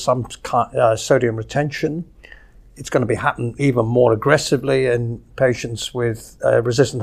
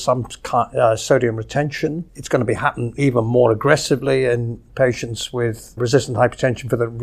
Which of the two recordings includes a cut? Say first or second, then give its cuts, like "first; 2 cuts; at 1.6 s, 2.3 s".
second; 2 cuts; at 2.1 s, 5.8 s